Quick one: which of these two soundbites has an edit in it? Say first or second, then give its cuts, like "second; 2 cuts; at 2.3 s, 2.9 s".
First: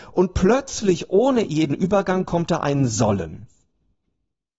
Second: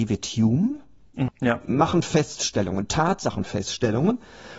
second; 1 cut; at 1.3 s